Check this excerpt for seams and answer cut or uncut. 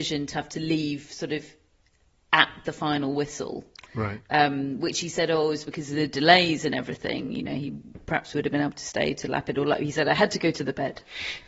uncut